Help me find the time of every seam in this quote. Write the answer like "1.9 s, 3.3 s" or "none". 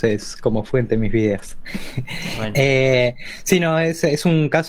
none